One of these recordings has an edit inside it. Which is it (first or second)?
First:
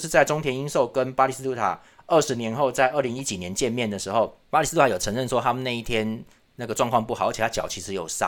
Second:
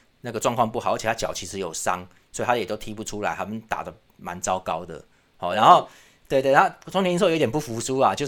first